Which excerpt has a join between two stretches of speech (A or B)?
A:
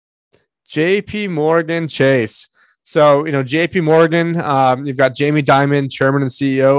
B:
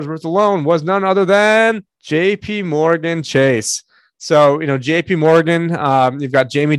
B